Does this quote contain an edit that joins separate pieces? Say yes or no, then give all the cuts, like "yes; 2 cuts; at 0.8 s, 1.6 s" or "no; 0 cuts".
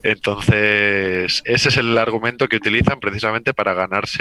yes; 1 cut; at 1.4 s